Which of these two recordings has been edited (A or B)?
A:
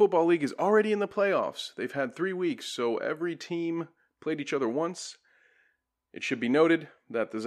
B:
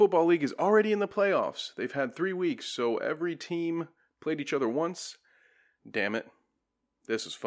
B